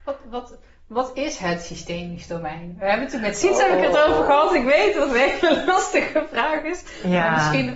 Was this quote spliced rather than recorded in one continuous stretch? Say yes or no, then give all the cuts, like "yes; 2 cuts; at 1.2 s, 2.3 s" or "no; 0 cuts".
no; 0 cuts